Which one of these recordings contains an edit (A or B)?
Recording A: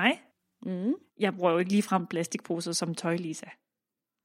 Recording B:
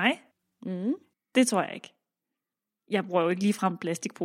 A